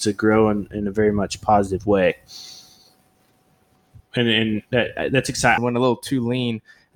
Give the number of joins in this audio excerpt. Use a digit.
2